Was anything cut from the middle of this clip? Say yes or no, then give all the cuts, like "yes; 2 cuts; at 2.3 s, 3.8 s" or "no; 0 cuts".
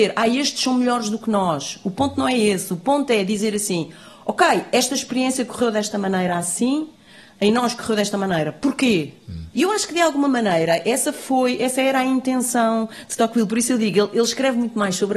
yes; 1 cut; at 9.5 s